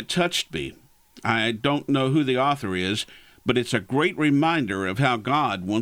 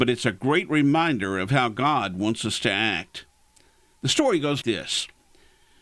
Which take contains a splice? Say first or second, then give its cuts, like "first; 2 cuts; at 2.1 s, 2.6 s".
second; 1 cut; at 4.6 s